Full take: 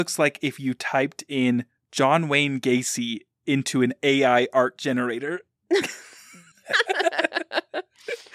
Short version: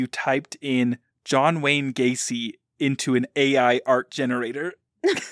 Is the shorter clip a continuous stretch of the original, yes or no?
yes